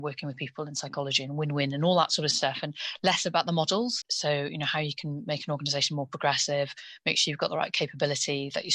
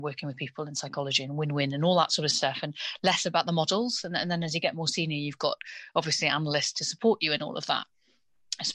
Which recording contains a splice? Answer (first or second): first